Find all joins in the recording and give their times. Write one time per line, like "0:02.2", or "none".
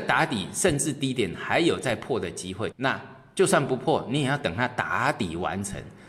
0:02.7